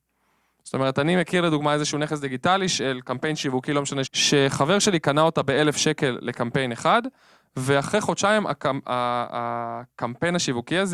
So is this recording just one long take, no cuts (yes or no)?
no